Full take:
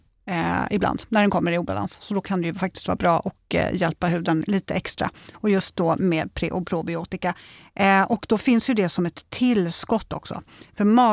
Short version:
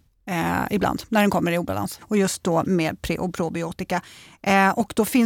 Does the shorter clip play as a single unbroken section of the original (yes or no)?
no